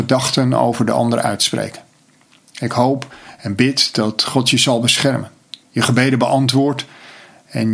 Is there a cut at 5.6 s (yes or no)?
yes